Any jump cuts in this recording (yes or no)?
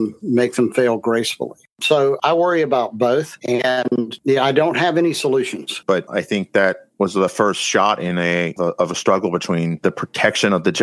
yes